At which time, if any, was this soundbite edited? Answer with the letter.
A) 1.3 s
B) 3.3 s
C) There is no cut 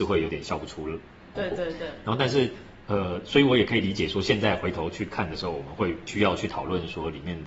A